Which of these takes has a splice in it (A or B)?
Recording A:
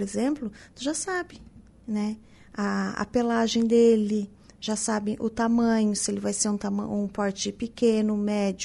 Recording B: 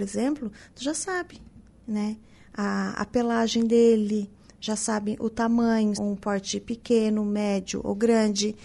B